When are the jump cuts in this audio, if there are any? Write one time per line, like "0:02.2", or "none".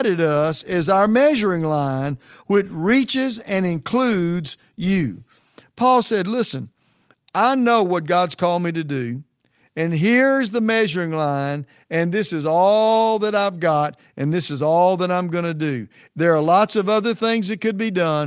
none